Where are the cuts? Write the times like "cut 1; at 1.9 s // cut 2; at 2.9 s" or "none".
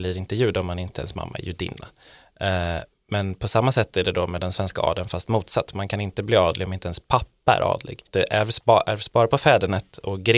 none